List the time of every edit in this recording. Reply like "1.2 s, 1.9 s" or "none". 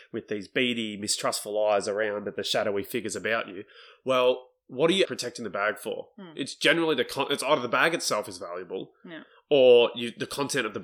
5.0 s